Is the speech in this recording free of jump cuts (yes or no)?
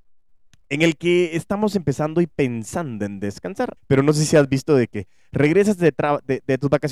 no